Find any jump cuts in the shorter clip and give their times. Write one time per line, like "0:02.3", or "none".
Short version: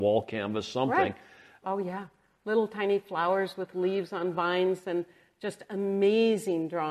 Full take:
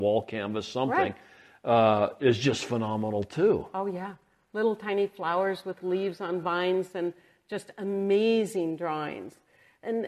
0:01.6